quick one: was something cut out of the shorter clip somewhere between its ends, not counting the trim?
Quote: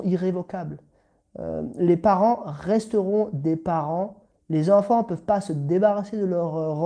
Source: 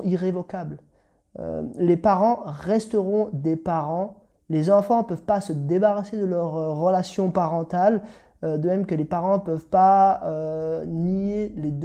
no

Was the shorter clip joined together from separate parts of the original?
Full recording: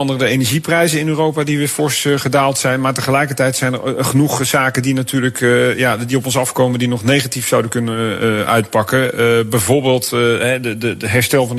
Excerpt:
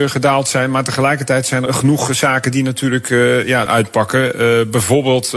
yes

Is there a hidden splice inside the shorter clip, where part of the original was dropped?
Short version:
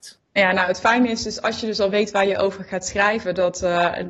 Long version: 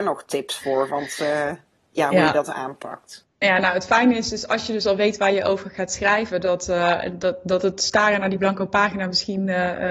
no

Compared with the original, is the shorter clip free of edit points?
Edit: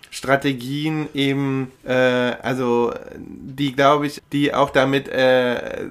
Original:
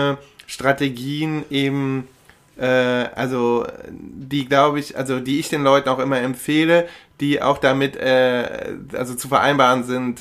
no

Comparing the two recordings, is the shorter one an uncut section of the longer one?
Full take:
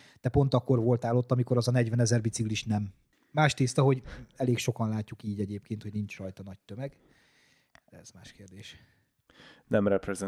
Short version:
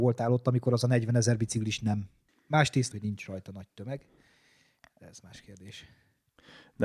no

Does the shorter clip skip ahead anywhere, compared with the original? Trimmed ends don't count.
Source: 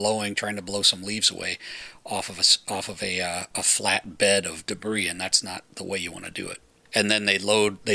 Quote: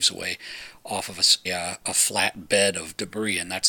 yes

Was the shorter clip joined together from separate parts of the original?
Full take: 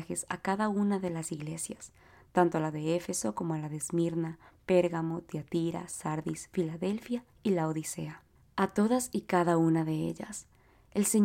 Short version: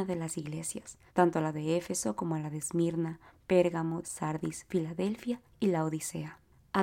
yes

